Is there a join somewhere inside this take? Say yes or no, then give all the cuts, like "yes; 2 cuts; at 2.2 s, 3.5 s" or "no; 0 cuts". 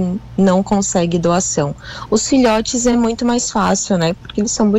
no; 0 cuts